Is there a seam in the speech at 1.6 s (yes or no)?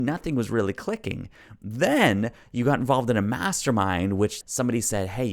no